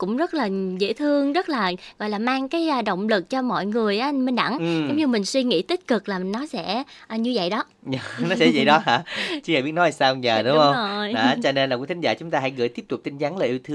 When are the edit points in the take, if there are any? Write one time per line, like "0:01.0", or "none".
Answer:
none